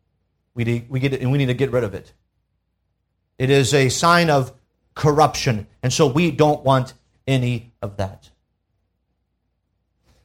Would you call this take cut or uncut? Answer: uncut